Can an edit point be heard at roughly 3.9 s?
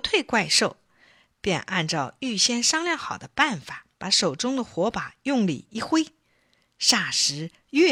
yes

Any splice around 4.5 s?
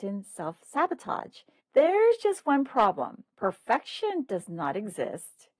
no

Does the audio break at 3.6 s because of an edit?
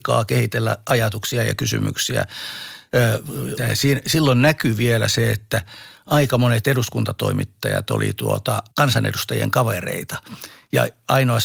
yes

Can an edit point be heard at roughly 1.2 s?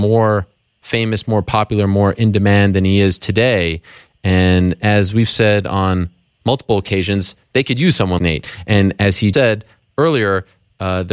no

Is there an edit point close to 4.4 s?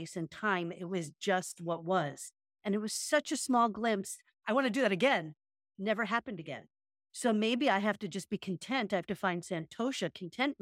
yes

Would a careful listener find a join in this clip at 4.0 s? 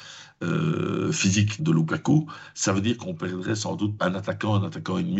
yes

